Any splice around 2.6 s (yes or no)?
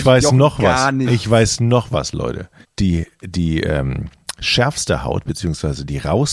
yes